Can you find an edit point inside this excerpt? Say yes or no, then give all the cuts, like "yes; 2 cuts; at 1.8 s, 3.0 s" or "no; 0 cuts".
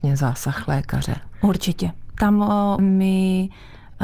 yes; 1 cut; at 2.8 s